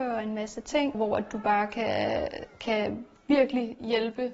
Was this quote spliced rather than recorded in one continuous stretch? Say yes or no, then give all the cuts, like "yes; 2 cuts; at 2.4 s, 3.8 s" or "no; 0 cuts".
yes; 1 cut; at 0.9 s